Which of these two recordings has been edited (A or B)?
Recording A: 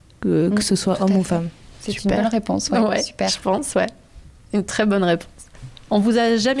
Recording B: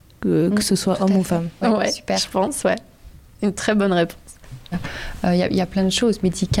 B